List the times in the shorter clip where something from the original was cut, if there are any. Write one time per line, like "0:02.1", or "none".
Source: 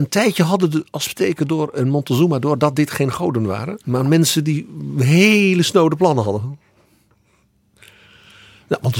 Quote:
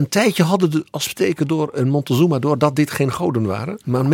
none